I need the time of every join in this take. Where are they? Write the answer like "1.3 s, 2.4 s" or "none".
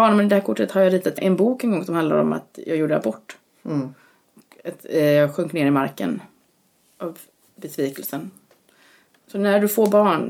1.2 s